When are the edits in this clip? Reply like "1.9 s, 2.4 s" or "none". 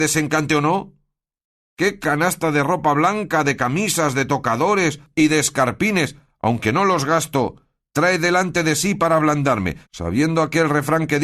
9.9 s